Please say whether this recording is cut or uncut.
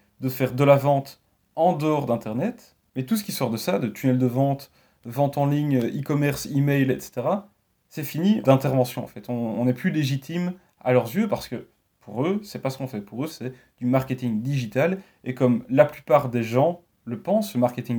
cut